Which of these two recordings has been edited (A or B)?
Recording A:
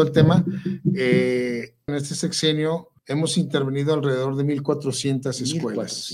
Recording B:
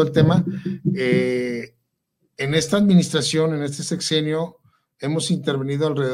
A